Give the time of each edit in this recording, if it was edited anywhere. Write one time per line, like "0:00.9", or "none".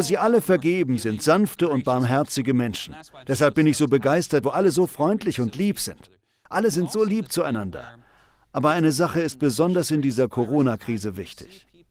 0:04.4